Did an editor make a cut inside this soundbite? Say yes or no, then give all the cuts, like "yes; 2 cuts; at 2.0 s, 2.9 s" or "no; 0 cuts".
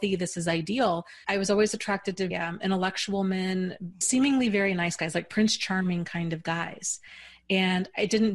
yes; 3 cuts; at 1.2 s, 2.3 s, 4.0 s